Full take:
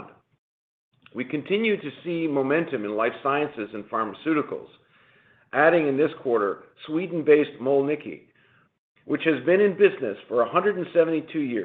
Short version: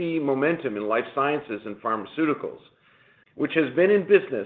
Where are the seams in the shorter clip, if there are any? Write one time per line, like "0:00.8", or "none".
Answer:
0:03.2